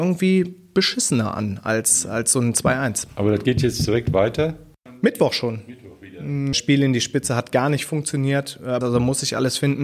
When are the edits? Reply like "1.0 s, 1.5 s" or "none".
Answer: 6.5 s, 8.8 s